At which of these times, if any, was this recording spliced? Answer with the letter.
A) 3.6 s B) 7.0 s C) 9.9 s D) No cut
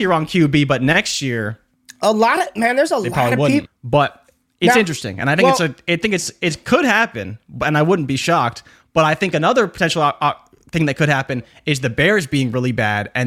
A